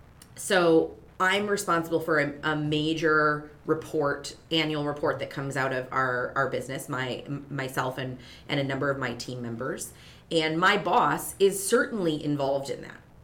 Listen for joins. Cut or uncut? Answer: uncut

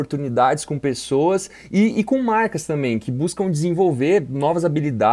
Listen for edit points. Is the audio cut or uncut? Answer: uncut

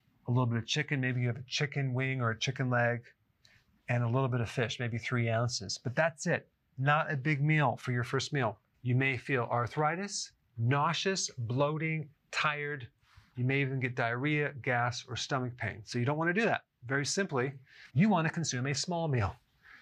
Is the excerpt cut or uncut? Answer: cut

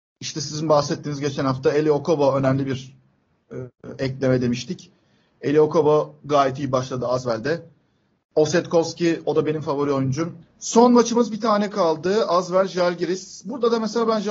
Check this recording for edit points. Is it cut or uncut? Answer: cut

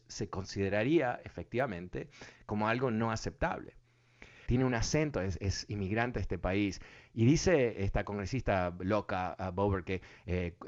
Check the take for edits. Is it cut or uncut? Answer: cut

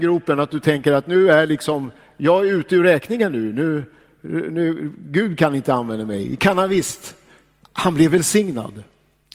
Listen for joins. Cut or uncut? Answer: cut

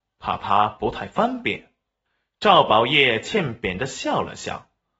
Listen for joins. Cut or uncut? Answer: uncut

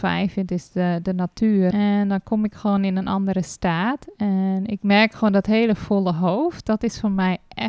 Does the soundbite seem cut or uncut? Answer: cut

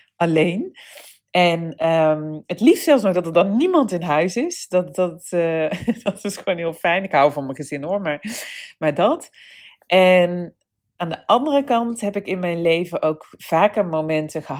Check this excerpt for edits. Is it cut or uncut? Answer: uncut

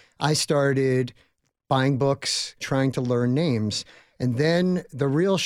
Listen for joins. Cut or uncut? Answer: cut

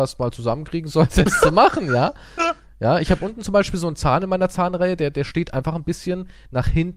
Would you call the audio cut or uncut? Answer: uncut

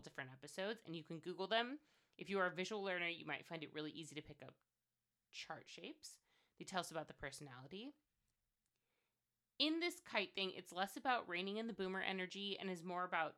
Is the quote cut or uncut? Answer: uncut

